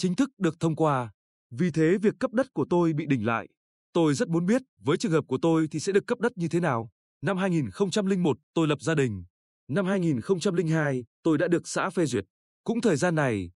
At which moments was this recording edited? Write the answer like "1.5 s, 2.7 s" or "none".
7.1 s, 11.1 s